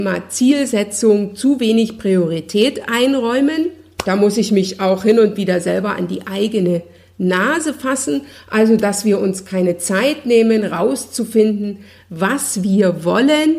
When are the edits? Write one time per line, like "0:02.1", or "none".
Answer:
none